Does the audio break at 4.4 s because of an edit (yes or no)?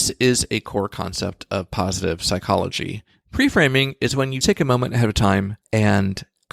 yes